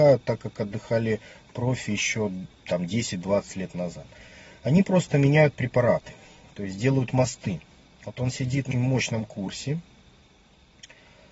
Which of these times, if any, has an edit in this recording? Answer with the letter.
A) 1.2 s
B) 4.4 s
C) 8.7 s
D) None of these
C